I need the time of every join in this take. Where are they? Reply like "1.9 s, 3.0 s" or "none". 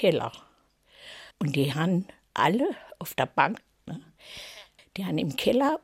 1.3 s, 3.9 s